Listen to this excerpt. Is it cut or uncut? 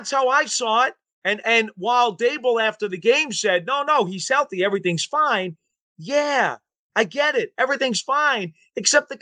uncut